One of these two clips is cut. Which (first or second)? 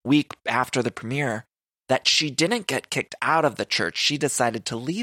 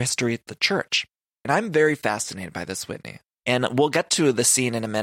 second